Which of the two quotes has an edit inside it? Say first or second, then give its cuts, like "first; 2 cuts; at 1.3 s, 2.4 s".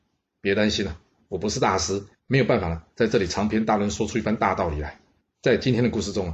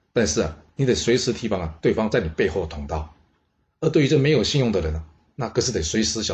first; 1 cut; at 5.2 s